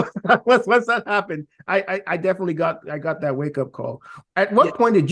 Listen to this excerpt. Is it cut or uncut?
uncut